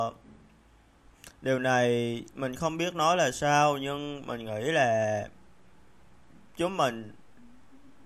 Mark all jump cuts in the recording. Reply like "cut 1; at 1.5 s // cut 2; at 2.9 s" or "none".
none

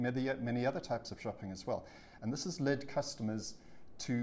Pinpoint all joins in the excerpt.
none

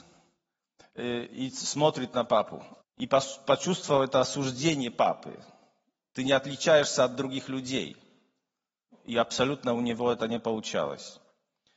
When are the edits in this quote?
cut 1; at 2.8 s // cut 2; at 6.1 s // cut 3; at 8.9 s

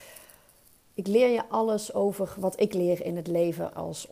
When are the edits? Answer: none

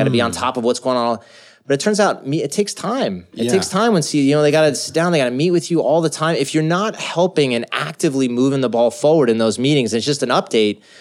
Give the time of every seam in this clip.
none

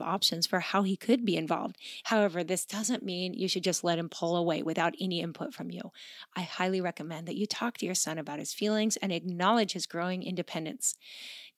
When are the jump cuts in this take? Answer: cut 1; at 2.0 s

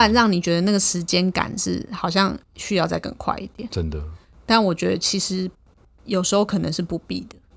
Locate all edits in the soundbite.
none

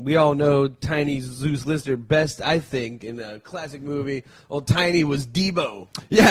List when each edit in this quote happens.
none

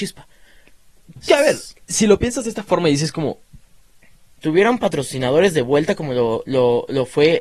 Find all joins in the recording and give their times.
cut 1; at 4.4 s

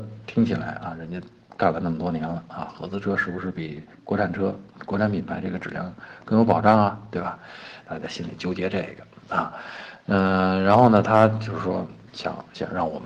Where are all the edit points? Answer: none

